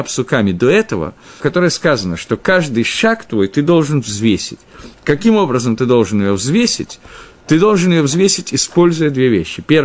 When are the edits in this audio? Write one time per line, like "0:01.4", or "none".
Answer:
0:01.4